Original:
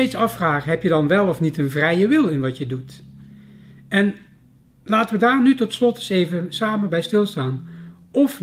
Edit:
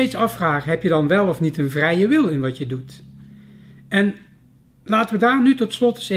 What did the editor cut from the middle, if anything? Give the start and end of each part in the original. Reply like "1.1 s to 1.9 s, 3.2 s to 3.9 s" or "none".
none